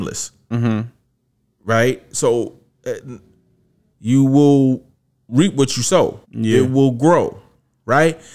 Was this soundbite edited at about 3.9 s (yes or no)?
yes